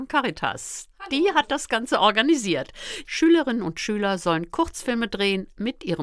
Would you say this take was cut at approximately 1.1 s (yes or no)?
no